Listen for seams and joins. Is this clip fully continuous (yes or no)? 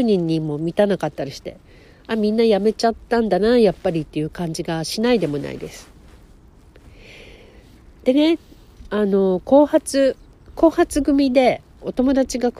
yes